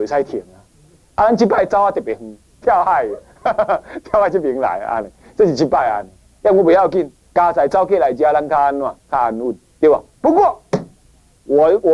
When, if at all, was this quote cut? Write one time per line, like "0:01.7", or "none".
0:02.6